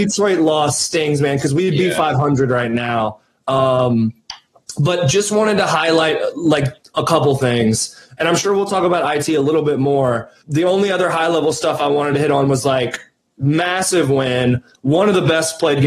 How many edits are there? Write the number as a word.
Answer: zero